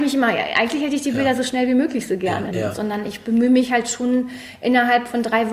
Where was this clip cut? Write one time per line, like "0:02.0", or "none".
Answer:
0:02.5